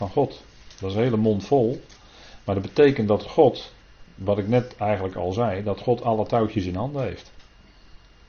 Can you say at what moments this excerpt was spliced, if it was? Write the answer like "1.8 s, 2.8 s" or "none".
none